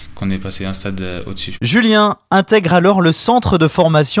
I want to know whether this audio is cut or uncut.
uncut